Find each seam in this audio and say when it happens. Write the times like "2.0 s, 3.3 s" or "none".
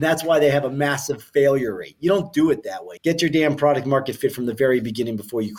3.0 s